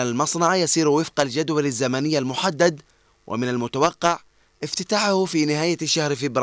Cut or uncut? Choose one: uncut